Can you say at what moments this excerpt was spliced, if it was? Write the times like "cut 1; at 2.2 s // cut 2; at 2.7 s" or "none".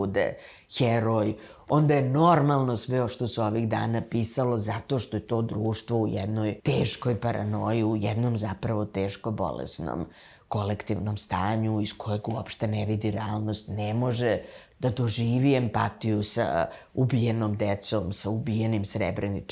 cut 1; at 6.6 s